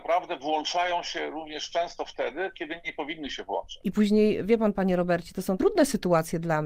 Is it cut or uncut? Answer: cut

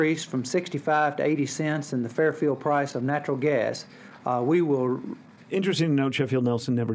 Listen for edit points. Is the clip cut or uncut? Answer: cut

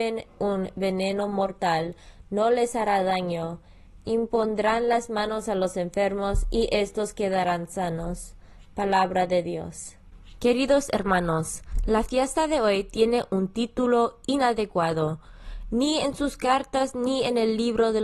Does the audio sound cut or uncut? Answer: cut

